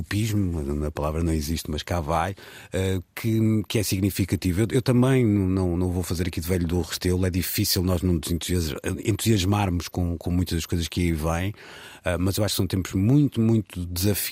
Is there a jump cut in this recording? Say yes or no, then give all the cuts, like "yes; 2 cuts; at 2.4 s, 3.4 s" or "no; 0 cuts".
no; 0 cuts